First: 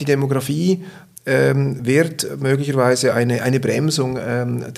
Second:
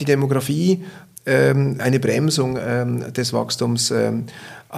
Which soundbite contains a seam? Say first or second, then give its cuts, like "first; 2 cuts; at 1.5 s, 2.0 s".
second; 1 cut; at 1.8 s